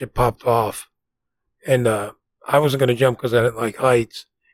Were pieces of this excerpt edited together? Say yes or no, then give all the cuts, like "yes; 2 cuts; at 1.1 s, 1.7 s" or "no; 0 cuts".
no; 0 cuts